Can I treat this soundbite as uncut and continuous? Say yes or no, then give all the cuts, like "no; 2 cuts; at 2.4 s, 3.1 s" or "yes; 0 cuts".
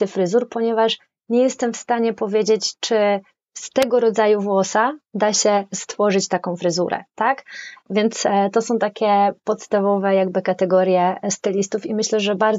yes; 0 cuts